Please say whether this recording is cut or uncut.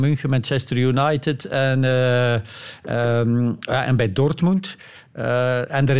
uncut